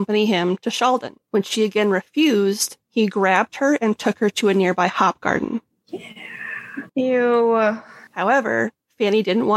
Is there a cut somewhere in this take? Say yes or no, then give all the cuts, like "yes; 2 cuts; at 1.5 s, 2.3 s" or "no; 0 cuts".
yes; 1 cut; at 6.9 s